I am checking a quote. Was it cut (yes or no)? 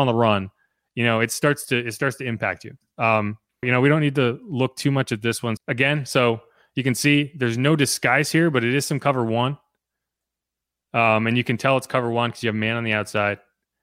yes